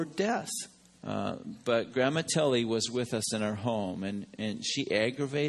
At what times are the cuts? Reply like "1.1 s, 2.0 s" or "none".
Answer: 1.0 s

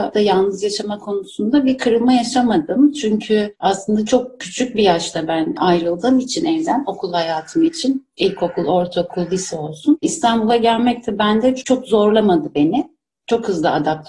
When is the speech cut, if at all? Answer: none

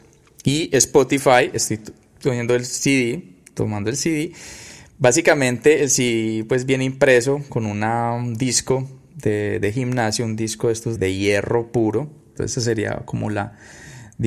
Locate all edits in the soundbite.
11.0 s, 12.4 s

